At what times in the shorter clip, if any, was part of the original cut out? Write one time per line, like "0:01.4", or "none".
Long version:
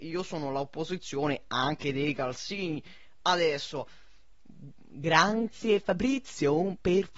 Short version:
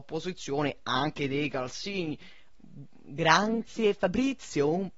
0:02.5